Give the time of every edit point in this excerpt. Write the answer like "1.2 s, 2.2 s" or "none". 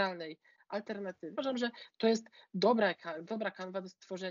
1.3 s